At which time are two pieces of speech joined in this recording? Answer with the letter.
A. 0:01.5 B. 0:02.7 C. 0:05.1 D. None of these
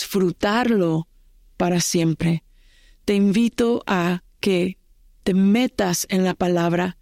D